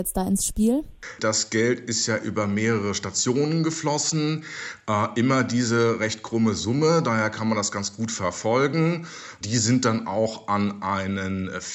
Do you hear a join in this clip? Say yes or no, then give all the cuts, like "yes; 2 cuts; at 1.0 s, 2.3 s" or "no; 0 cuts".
yes; 2 cuts; at 1.2 s, 9.4 s